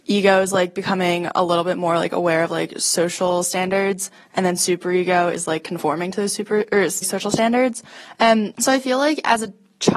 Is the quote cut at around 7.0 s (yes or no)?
yes